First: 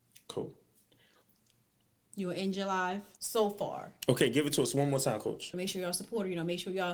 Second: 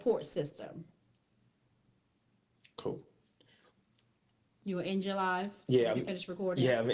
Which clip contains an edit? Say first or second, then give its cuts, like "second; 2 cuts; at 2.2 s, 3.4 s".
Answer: first; 2 cuts; at 3.2 s, 5.5 s